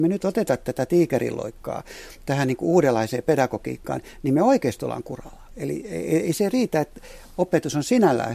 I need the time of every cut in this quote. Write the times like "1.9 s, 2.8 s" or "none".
none